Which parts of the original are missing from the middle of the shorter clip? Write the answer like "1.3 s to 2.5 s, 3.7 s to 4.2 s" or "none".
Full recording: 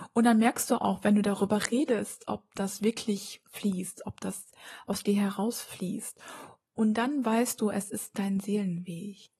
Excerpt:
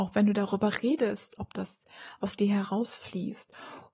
2.3 s to 4.0 s